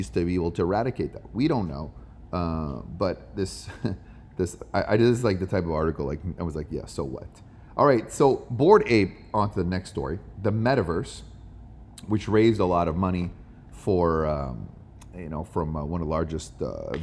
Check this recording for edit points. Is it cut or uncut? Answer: uncut